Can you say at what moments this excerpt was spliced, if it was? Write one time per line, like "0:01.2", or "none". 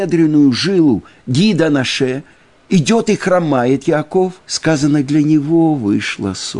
0:04.4